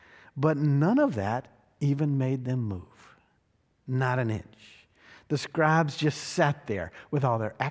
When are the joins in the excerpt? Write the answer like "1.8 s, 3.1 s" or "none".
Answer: none